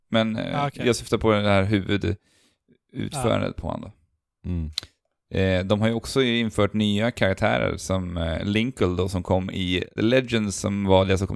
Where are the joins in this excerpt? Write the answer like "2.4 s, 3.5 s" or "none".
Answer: 10.0 s